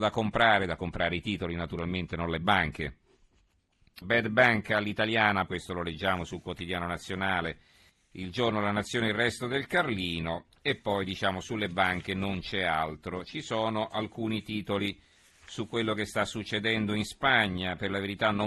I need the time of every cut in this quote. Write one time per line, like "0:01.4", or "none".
0:04.0
0:05.5